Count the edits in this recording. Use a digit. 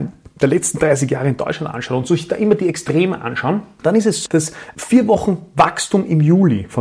1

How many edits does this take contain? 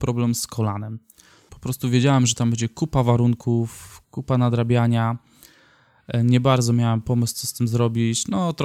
1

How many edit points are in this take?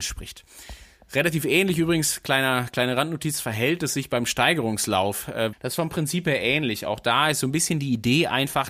1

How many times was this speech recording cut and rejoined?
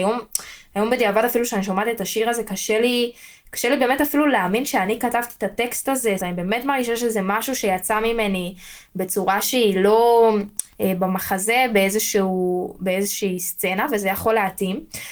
2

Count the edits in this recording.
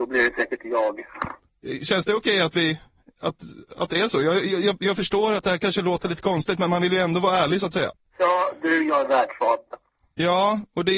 1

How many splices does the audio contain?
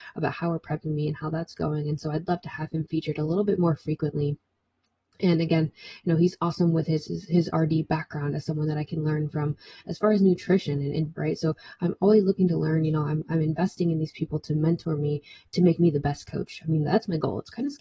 1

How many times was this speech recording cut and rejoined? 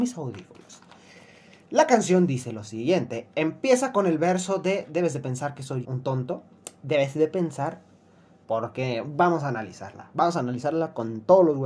2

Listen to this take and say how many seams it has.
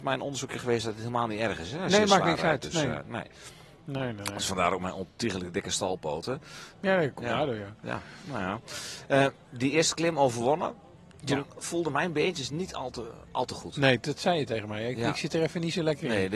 1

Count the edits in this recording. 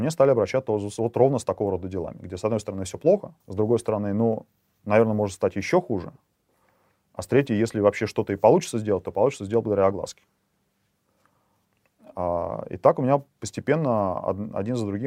1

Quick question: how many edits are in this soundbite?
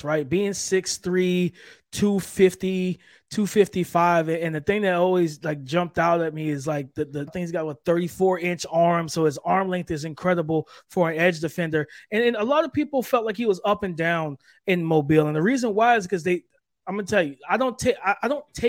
1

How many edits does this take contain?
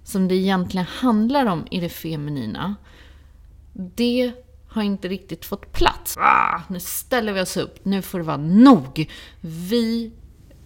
1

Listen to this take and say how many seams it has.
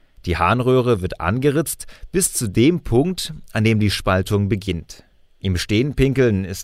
0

